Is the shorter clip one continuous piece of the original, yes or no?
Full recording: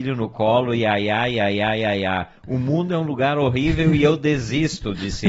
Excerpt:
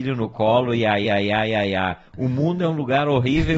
no